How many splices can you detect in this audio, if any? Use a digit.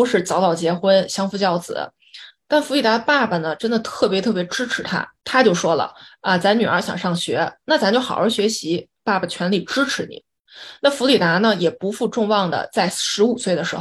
1